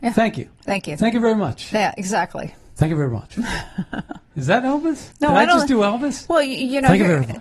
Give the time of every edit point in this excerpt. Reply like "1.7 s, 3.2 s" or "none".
5.1 s